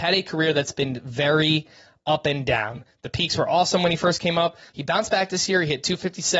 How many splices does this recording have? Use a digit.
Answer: 1